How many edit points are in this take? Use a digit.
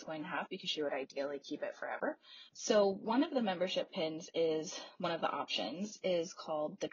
1